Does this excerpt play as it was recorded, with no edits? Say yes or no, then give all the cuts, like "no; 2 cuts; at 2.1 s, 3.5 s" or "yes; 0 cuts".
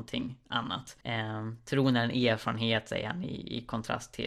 no; 1 cut; at 1.0 s